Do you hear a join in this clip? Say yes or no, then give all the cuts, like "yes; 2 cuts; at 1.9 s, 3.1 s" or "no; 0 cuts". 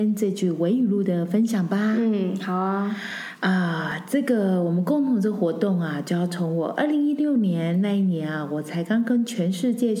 no; 0 cuts